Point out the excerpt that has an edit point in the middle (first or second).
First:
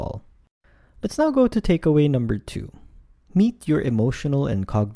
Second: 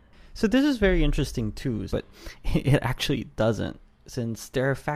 second